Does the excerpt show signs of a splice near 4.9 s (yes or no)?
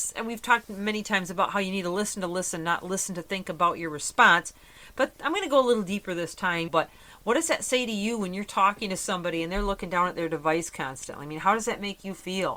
no